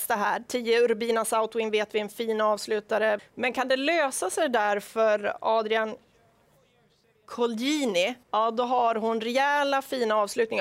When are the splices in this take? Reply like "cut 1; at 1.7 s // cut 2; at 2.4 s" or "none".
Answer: cut 1; at 3.2 s // cut 2; at 8.2 s